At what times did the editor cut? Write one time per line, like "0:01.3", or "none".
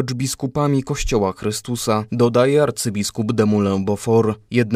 0:02.1

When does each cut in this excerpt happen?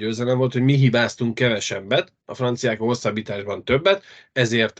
none

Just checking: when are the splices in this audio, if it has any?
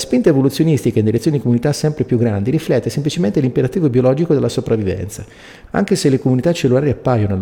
0:05.7

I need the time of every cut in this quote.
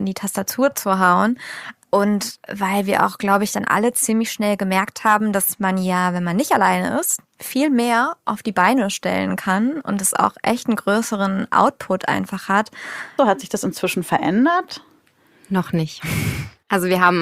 0:13.2

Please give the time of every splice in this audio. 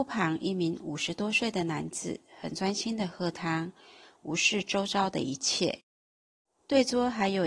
none

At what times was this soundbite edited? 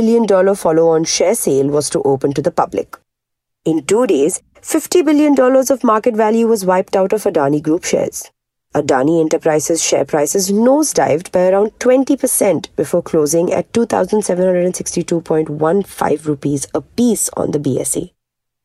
none

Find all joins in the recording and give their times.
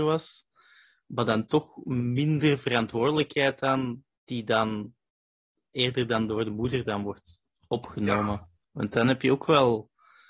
0:08.6

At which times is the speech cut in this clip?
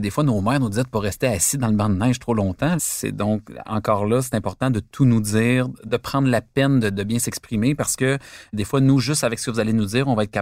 0:02.8

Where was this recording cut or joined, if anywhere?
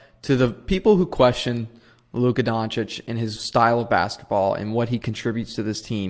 none

